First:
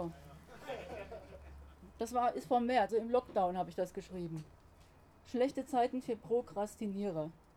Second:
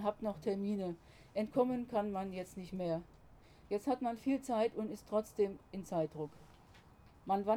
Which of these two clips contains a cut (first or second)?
first